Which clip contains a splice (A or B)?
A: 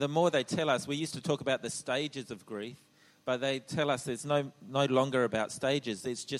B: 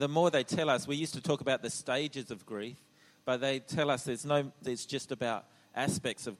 B